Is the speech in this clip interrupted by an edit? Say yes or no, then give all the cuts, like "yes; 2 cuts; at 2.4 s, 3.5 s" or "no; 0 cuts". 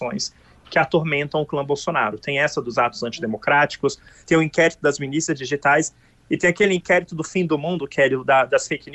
no; 0 cuts